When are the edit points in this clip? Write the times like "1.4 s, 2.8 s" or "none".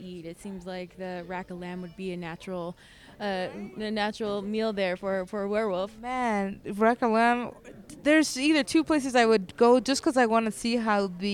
none